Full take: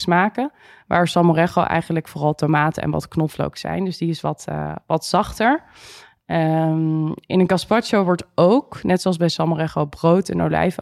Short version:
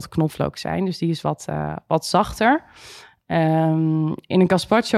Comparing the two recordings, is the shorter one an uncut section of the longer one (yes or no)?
yes